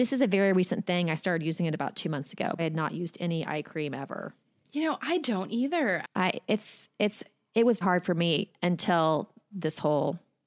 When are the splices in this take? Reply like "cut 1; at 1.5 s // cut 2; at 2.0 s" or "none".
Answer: cut 1; at 2.6 s // cut 2; at 6.0 s // cut 3; at 7.8 s